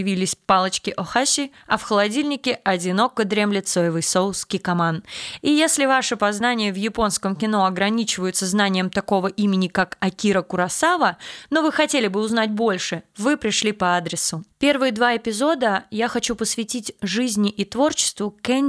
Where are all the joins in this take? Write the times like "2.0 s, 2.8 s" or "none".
14.5 s